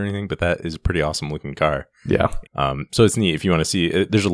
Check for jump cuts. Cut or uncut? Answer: cut